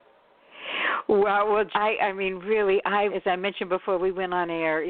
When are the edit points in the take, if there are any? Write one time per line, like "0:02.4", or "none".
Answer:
0:01.7
0:03.1